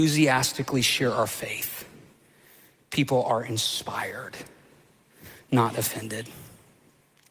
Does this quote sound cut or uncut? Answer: uncut